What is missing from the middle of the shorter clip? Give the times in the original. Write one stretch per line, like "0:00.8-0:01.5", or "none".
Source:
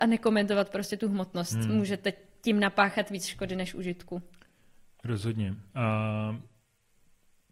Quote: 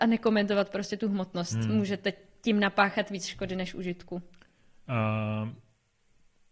0:04.8-0:05.7

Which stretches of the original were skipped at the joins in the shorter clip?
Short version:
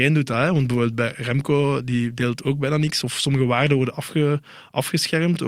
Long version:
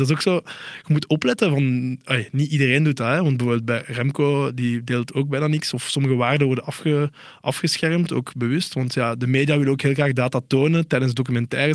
none

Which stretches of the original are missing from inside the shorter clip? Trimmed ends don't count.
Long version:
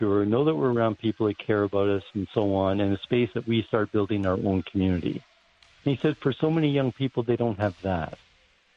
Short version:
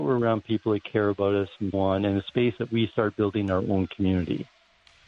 0:02.3-0:02.5

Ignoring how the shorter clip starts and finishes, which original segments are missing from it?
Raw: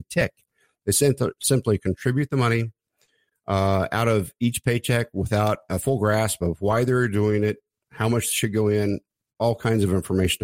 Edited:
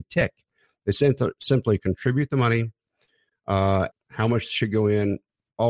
0:03.9-0:07.7

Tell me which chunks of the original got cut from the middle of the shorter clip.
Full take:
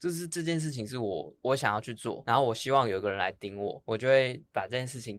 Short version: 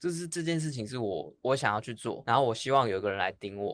none

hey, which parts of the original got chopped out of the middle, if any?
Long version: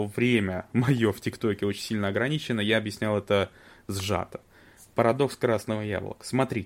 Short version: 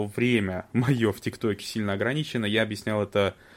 0:01.6-0:01.7

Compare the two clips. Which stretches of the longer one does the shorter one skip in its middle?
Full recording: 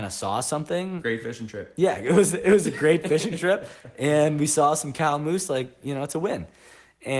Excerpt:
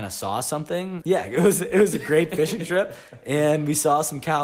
0:01.0-0:01.7

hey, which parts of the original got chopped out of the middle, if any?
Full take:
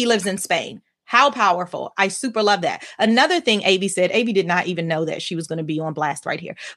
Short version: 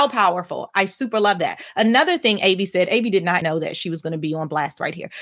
0:04.6-0:04.9

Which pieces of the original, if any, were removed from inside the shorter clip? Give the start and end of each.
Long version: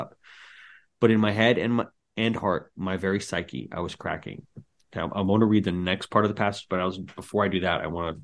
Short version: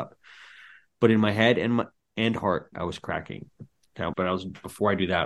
0:02.7-0:03.7
0:05.1-0:06.7

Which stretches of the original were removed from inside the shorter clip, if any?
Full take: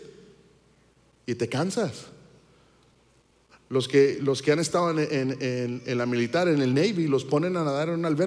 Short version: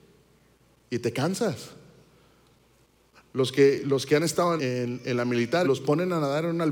0:04.9-0:05.4
0:06.4-0:07.1

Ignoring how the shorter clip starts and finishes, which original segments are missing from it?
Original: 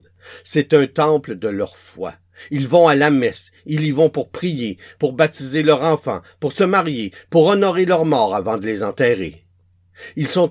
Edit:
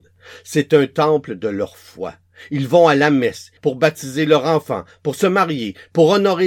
0:03.6-0:04.9

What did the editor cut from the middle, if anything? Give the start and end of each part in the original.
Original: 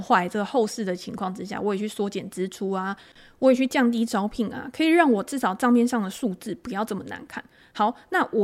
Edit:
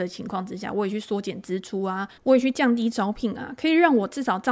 0:03.0-0:03.3

